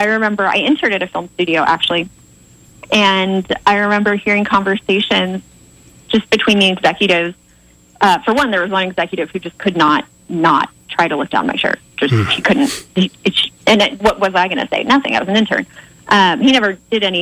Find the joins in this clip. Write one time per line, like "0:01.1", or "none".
none